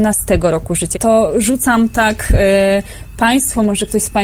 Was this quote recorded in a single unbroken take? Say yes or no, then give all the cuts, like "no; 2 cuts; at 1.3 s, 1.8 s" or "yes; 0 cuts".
no; 1 cut; at 0.9 s